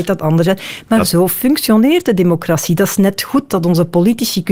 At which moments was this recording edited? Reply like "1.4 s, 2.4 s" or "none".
none